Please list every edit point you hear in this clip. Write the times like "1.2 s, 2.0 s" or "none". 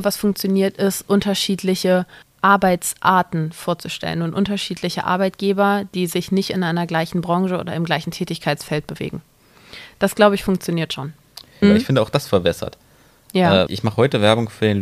11.6 s, 13.7 s